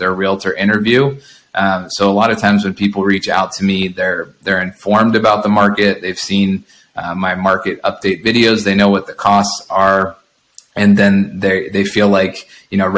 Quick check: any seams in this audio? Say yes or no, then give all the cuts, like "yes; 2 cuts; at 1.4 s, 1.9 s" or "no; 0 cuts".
no; 0 cuts